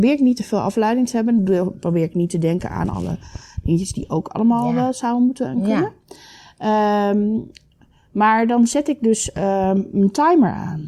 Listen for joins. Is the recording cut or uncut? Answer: uncut